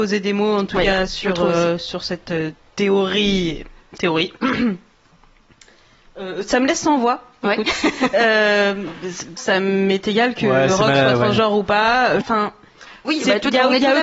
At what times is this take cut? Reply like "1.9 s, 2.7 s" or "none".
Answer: 9.4 s, 12.2 s